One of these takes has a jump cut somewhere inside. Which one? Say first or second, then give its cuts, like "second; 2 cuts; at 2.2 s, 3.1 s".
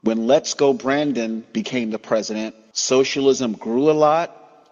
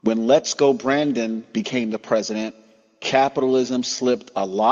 first; 1 cut; at 2.7 s